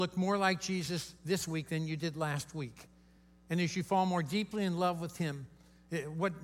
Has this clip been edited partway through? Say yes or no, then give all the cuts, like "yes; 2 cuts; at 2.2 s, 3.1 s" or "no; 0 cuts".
no; 0 cuts